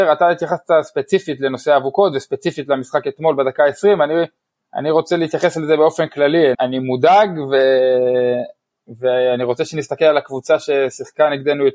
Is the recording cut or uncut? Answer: cut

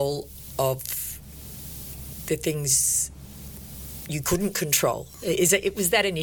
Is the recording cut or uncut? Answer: uncut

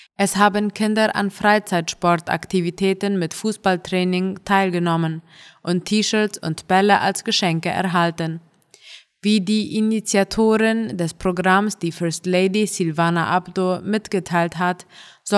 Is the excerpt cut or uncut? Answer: uncut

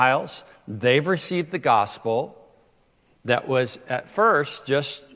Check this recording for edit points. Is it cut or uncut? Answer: uncut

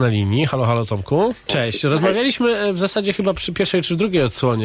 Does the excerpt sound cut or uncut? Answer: cut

